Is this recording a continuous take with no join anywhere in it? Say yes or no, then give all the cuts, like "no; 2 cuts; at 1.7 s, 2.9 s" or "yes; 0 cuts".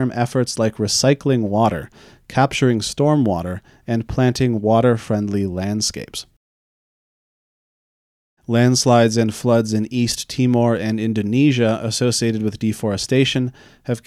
yes; 0 cuts